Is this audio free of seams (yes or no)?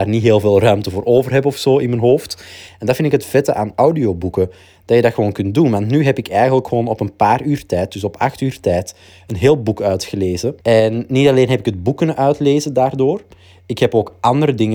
no